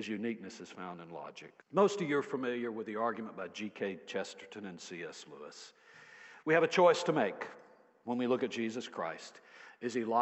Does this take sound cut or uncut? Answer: cut